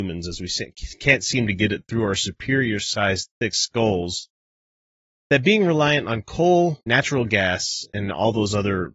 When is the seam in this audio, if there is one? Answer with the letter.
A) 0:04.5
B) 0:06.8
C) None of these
B